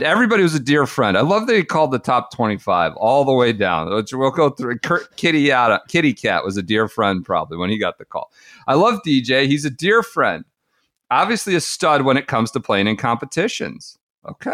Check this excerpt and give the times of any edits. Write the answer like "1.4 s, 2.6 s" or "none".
none